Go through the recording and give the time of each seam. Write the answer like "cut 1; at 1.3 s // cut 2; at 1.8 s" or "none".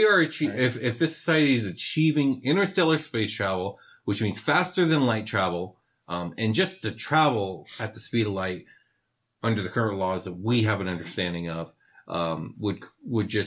none

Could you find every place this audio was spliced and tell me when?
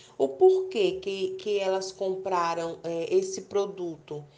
none

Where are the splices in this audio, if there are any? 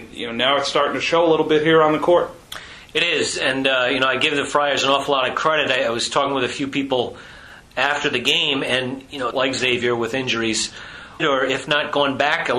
cut 1; at 9.3 s // cut 2; at 11.2 s

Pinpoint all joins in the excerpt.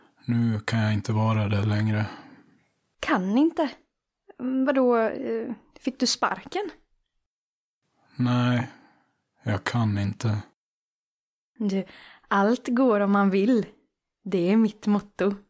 none

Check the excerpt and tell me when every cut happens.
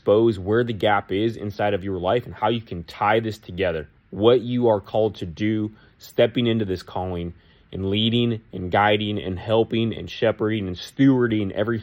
cut 1; at 4.0 s

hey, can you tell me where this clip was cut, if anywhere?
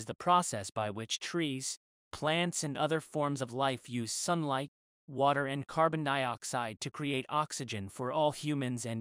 none

